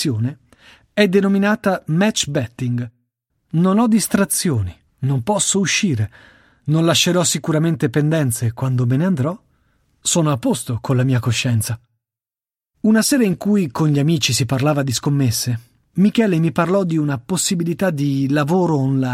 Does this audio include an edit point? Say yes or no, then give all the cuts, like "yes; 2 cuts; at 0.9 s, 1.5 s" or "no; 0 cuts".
yes; 1 cut; at 3.3 s